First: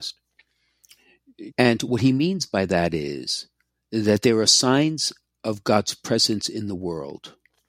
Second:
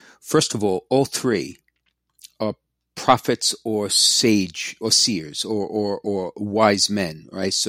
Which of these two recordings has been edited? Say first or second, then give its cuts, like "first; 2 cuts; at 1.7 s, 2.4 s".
first; 1 cut; at 1.5 s